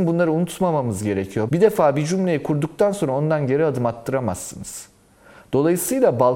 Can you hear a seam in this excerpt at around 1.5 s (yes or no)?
yes